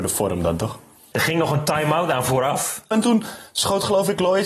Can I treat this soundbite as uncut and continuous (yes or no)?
no